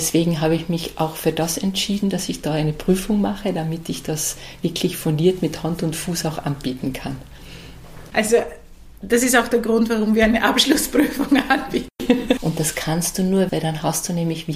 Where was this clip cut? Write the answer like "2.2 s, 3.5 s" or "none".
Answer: 8.1 s, 12.4 s, 13.5 s